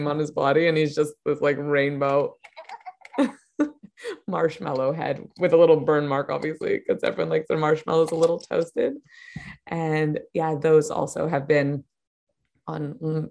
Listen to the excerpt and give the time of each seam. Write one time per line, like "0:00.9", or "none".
none